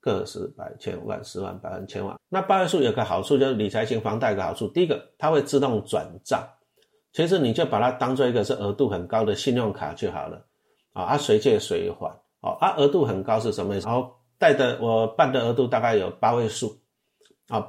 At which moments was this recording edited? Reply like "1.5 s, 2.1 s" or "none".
2.1 s, 10.8 s, 13.8 s